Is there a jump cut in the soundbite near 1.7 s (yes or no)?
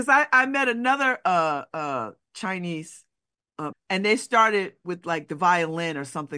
no